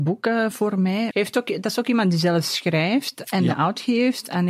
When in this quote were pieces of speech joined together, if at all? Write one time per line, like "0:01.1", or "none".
0:01.1